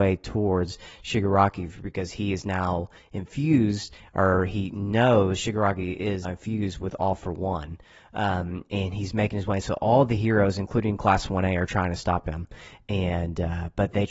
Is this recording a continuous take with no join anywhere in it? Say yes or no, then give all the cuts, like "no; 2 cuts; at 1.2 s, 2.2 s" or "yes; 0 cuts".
no; 1 cut; at 6.2 s